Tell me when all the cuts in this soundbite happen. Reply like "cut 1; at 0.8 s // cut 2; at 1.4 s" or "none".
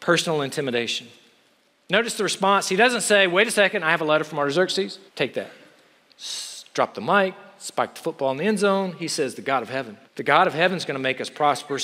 cut 1; at 5.1 s // cut 2; at 10.1 s